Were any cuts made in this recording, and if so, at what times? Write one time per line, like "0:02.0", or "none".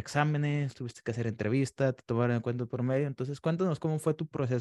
none